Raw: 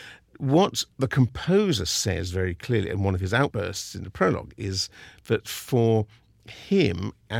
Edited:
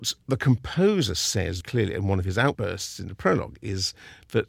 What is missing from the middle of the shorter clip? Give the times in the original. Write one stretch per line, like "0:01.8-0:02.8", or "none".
0:02.3-0:02.6